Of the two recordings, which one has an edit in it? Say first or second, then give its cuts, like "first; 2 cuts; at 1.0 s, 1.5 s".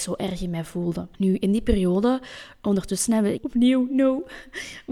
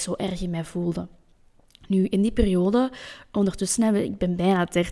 first; 2 cuts; at 1.1 s, 3.4 s